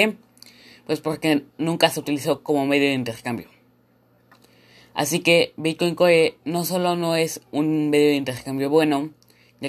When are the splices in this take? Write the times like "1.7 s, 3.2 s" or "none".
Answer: none